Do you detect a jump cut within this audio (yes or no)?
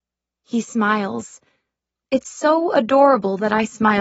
no